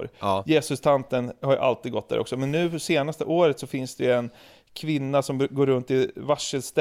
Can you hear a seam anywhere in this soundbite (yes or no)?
no